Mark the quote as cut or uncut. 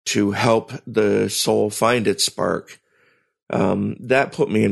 uncut